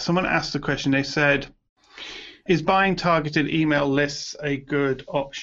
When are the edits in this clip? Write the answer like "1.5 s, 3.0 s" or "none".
2.5 s